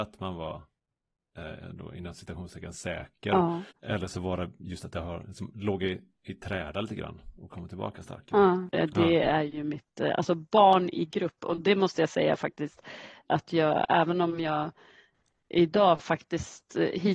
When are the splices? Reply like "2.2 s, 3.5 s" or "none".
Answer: 3.7 s, 8.7 s